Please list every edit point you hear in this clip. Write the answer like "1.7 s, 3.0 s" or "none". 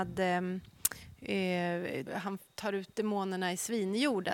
2.1 s